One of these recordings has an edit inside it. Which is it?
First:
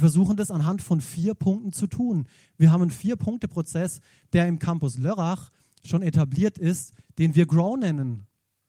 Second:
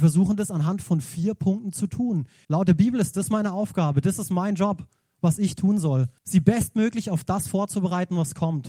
second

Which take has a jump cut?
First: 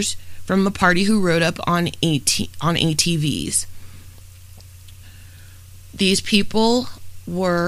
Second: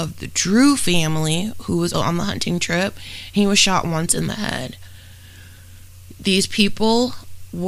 second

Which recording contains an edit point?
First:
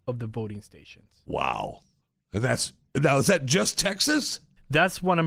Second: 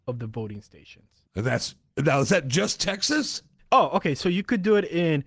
second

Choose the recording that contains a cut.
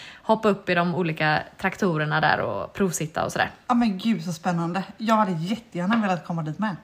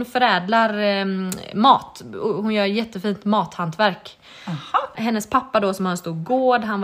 second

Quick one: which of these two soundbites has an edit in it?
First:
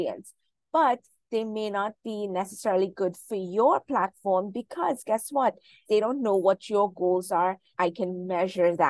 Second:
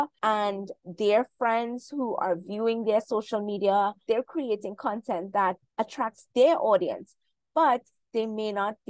first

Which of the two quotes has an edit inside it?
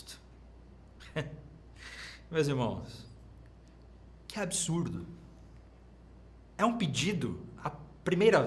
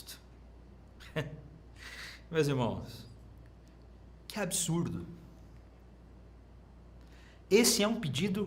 first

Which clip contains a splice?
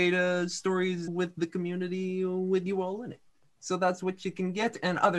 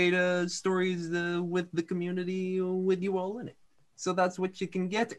first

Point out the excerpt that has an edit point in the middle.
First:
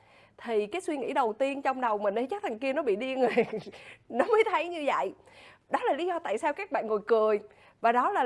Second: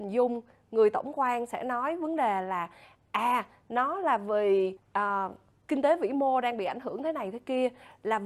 second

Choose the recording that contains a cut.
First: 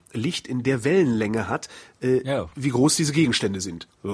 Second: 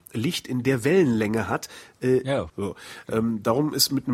second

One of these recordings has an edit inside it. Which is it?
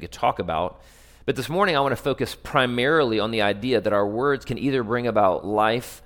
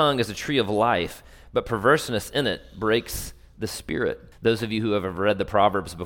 second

